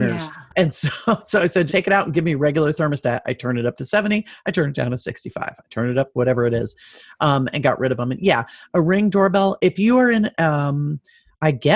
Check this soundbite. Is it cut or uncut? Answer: cut